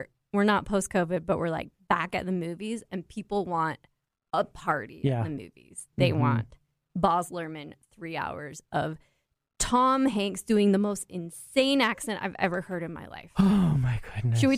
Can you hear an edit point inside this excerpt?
yes; 1 cut; at 5.9 s

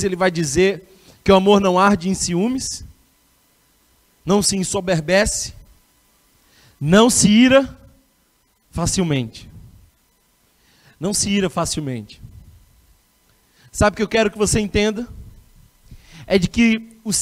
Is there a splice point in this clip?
no; 0 cuts

